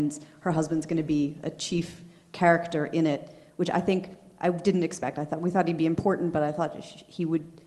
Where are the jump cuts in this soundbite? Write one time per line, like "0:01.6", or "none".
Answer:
none